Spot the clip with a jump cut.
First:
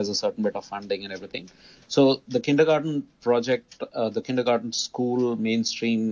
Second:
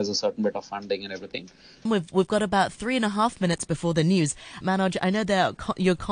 second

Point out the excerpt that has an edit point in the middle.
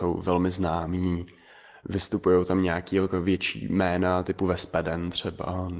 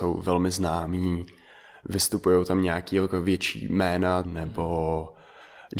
second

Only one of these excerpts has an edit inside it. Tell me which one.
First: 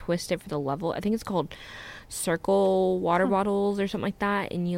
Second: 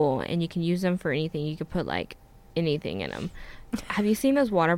second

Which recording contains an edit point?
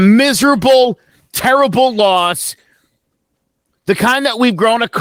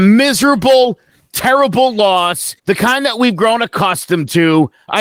second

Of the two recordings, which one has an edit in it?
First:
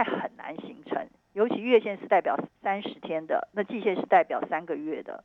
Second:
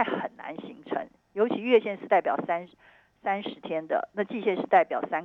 first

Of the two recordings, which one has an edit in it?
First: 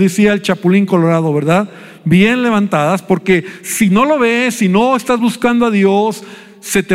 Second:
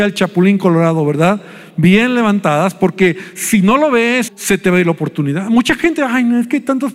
second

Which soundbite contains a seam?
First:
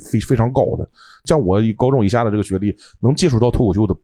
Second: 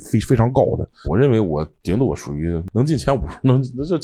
second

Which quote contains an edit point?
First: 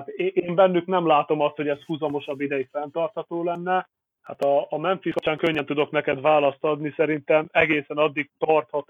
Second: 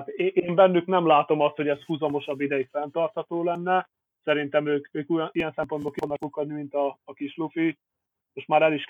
first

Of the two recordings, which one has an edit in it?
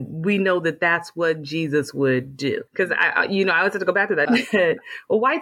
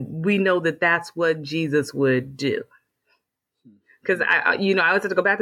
first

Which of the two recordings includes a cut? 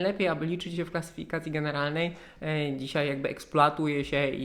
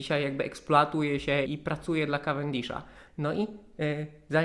second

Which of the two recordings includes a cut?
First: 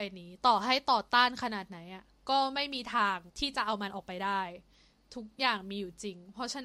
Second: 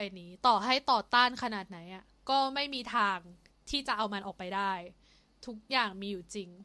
first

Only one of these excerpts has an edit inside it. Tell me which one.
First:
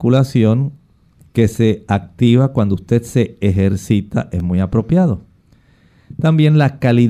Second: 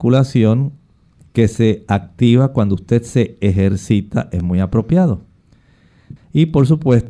second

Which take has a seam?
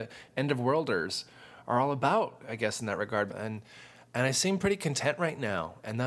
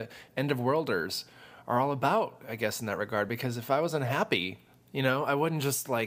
first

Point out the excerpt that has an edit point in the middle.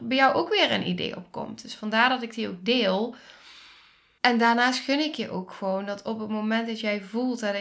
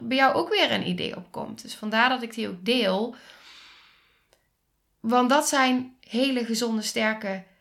first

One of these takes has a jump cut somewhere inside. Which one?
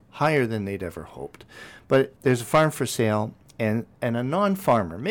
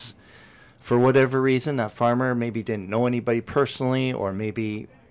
first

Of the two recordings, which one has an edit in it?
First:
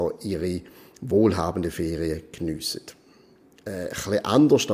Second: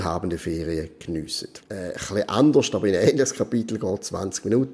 second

